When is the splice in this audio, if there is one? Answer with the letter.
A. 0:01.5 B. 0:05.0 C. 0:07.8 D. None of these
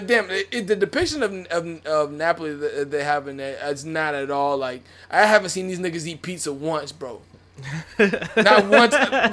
D